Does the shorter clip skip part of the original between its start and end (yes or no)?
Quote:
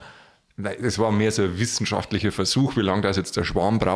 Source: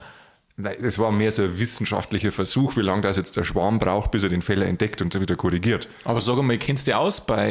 no